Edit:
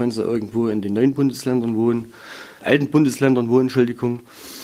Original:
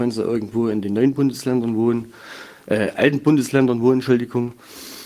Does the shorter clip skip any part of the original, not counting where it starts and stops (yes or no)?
yes